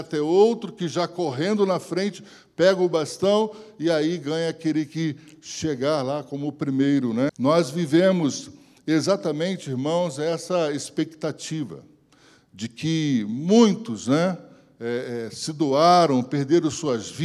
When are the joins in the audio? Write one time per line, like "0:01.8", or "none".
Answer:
0:07.3